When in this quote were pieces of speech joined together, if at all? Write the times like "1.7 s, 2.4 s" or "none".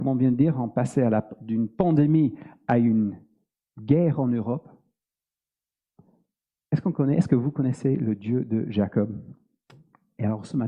none